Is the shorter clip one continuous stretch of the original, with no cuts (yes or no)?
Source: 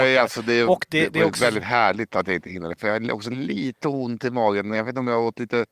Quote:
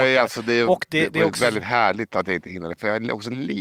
yes